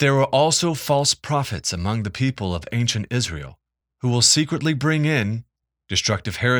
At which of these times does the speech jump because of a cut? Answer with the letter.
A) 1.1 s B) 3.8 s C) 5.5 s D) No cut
B